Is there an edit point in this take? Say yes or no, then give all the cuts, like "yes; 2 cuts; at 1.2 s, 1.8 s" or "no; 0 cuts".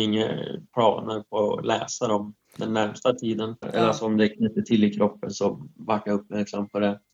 yes; 1 cut; at 3.6 s